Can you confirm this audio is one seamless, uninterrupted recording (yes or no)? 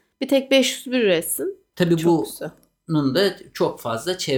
no